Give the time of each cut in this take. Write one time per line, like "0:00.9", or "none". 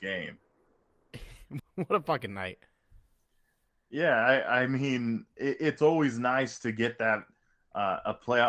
0:01.6